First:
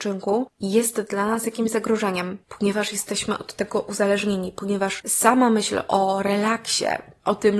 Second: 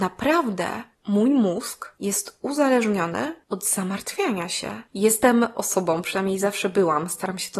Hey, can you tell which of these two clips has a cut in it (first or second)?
second